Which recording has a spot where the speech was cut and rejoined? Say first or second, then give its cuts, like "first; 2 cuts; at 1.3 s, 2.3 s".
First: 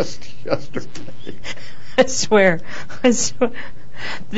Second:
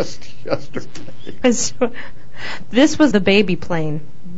second; 2 cuts; at 1.4 s, 3.1 s